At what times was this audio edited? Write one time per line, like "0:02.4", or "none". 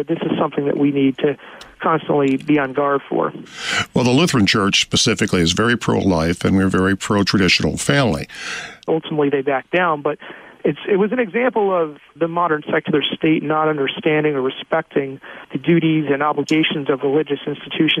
0:08.9
0:12.2